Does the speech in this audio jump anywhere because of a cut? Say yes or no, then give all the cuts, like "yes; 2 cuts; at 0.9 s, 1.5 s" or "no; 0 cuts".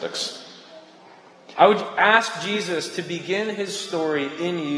yes; 1 cut; at 1.6 s